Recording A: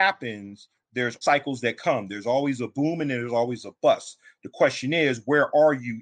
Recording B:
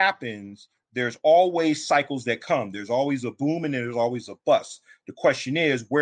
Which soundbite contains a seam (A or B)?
A